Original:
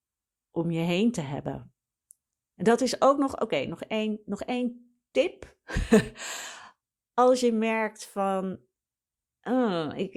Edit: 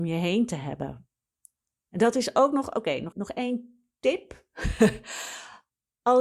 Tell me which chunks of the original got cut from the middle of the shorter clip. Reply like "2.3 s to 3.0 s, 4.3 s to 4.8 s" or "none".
3.8 s to 4.2 s